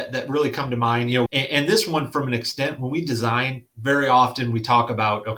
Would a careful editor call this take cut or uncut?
cut